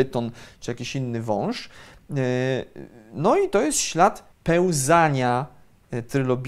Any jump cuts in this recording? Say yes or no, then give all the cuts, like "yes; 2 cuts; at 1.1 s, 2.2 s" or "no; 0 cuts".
yes; 1 cut; at 4.3 s